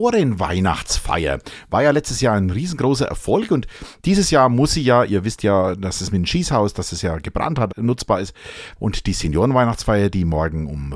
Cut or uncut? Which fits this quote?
cut